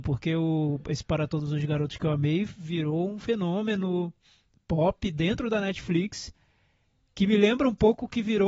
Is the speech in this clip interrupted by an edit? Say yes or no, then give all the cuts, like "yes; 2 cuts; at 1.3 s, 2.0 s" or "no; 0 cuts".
no; 0 cuts